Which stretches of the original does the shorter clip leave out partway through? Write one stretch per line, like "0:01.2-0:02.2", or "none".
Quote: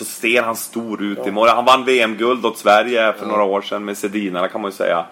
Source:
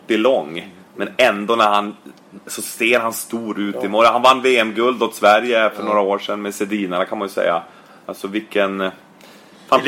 none